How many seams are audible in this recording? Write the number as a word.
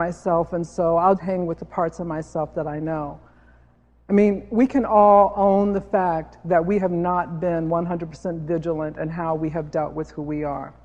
one